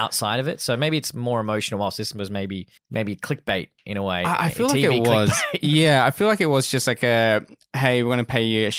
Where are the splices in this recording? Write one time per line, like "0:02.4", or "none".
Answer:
0:02.8

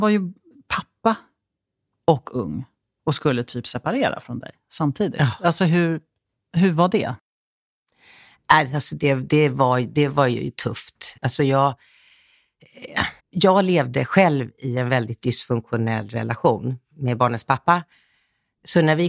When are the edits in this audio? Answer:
0:11.2
0:13.2

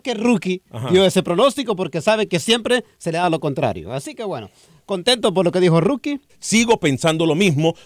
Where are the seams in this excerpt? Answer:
0:06.3

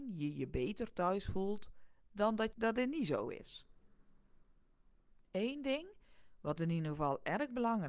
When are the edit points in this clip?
0:02.5

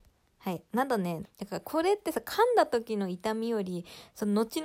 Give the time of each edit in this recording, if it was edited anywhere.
0:01.2

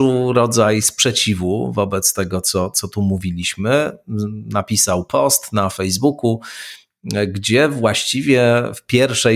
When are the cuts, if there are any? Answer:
none

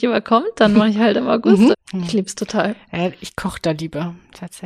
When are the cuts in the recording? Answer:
0:01.7

